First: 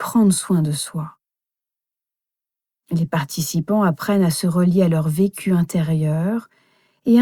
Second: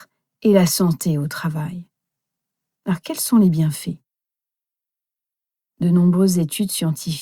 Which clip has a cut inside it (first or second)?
second